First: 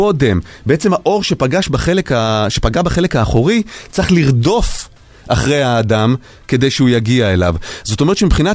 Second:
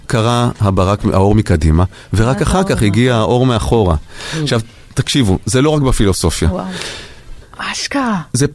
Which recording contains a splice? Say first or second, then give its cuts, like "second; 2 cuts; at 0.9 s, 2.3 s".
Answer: second; 1 cut; at 7.4 s